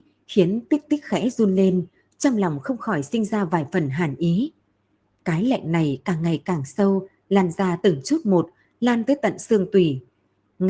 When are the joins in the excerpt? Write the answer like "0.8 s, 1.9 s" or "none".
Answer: none